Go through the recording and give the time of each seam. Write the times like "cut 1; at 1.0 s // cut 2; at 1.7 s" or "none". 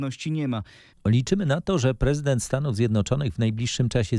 cut 1; at 0.9 s